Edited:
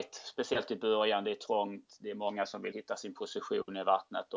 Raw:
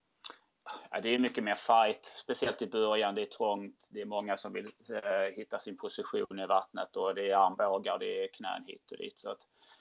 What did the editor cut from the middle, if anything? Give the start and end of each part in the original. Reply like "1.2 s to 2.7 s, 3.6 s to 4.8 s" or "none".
4.6 s to 5.3 s